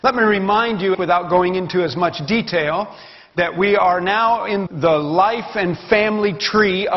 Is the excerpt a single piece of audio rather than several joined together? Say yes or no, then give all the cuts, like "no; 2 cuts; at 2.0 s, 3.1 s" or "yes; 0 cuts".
no; 2 cuts; at 0.9 s, 4.7 s